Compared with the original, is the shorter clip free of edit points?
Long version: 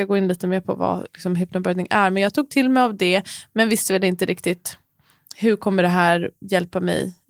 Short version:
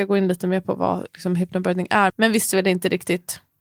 no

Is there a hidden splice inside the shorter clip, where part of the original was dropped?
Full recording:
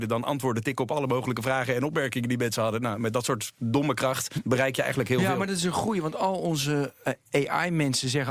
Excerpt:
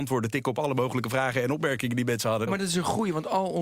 yes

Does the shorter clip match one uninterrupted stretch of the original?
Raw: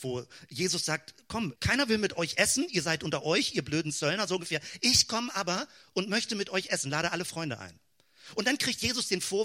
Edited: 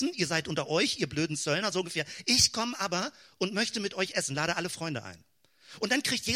yes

